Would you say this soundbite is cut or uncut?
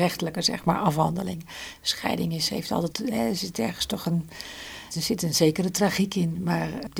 cut